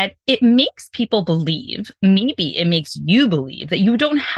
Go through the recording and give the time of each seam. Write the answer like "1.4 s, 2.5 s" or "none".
none